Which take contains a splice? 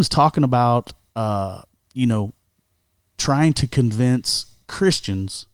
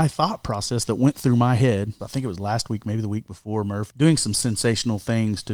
second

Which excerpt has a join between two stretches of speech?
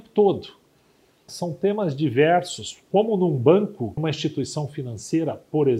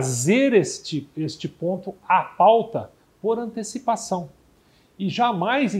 first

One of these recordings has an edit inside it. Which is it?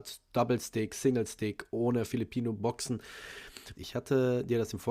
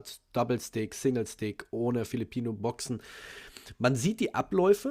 first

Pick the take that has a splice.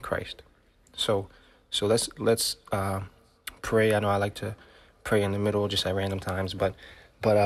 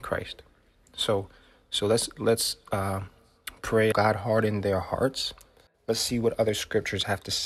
second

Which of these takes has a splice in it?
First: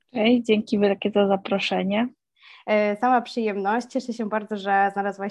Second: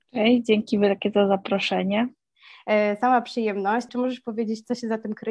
second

